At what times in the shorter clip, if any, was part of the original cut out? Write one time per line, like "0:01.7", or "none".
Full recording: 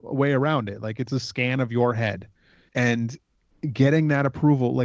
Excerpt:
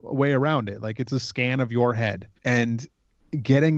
0:02.4